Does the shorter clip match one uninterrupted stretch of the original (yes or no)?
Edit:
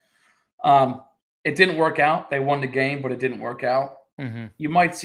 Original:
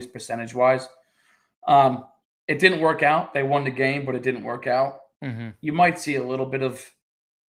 yes